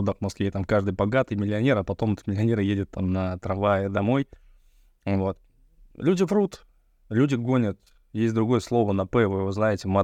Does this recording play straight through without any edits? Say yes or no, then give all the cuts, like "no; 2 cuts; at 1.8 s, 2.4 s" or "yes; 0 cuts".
yes; 0 cuts